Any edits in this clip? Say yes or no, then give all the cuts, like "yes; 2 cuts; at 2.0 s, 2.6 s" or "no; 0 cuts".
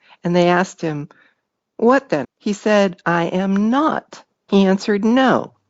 yes; 2 cuts; at 2.2 s, 4.5 s